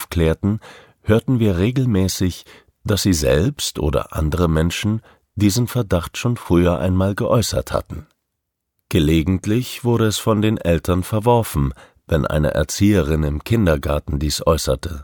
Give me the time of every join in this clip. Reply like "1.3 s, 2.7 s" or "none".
none